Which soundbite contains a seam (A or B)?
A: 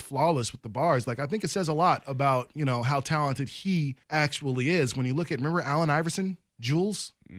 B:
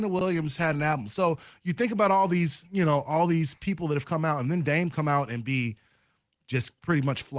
A